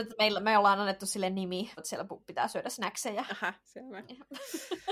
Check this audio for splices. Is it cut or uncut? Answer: cut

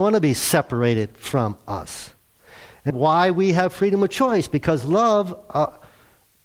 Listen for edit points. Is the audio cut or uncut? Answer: cut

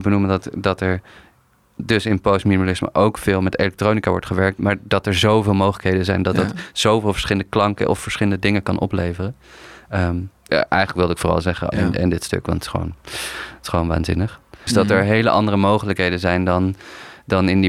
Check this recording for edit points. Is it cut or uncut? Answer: cut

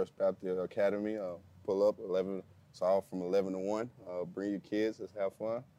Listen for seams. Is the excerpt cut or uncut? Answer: uncut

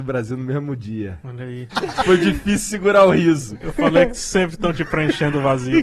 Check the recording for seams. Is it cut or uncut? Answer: cut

